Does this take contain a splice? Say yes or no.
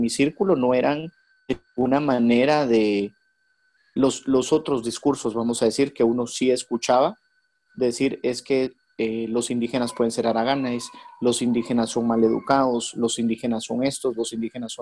no